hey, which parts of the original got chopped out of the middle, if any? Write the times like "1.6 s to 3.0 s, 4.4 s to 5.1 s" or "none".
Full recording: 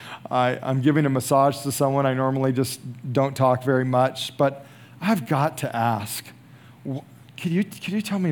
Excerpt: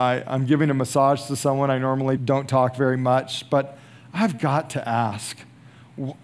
2.5 s to 3.0 s